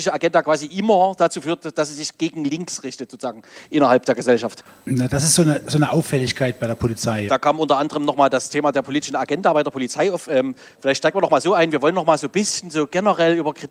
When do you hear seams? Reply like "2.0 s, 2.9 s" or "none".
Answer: 7.3 s